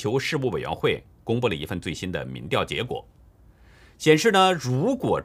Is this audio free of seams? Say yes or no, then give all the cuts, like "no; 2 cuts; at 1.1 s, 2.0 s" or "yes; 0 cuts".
yes; 0 cuts